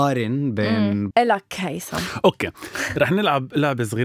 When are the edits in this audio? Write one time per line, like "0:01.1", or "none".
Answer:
0:01.1